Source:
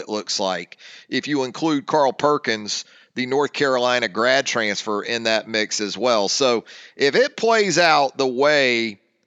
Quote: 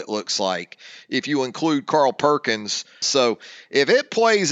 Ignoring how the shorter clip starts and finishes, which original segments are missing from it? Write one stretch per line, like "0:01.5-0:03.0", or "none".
0:03.0-0:06.3